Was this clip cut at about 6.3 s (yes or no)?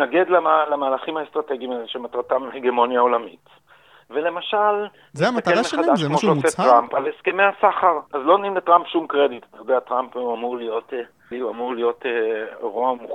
no